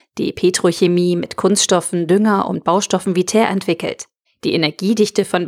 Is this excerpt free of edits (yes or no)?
no